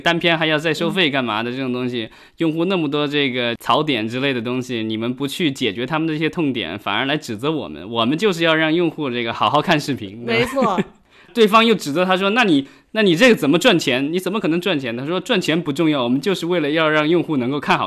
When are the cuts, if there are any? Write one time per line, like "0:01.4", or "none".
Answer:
none